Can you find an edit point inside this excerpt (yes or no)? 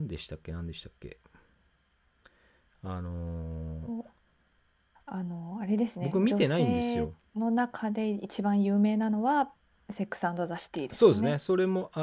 no